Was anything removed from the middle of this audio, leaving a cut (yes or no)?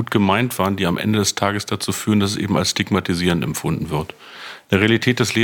no